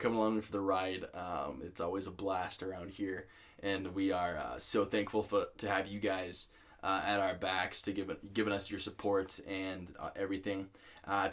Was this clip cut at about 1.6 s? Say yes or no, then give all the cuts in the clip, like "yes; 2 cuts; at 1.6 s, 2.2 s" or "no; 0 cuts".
no; 0 cuts